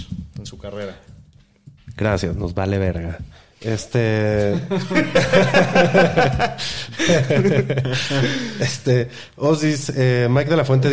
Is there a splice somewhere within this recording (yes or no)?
no